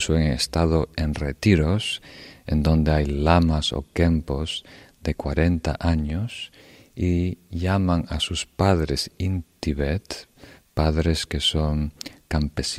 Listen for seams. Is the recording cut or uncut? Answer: uncut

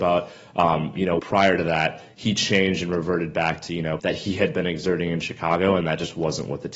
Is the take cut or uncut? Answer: cut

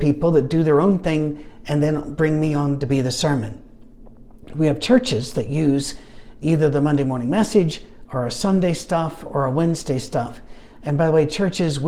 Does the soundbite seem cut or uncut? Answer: uncut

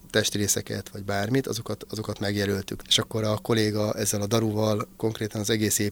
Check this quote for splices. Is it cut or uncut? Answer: cut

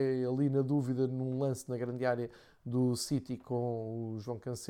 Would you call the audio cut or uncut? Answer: uncut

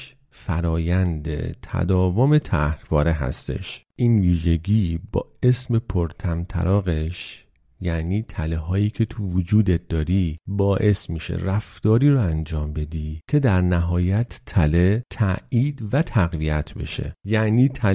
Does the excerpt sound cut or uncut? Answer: cut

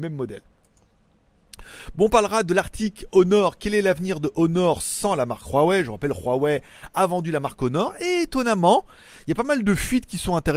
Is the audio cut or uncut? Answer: uncut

